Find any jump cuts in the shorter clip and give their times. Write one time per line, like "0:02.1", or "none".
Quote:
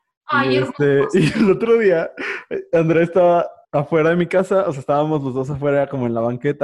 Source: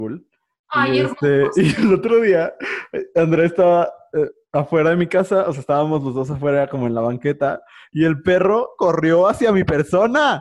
0:03.6